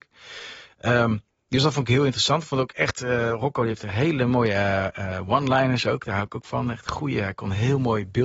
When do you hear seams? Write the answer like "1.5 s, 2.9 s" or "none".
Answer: none